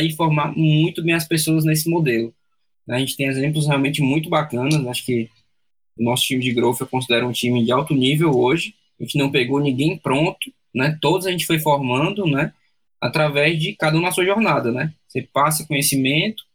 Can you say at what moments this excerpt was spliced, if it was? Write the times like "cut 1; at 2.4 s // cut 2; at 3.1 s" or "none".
none